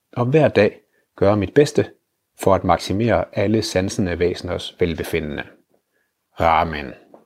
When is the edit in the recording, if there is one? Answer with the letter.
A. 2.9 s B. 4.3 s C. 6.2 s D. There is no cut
D